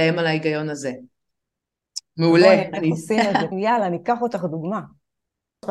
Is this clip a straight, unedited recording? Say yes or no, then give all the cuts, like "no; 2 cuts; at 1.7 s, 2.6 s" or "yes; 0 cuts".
no; 2 cuts; at 2.1 s, 3.5 s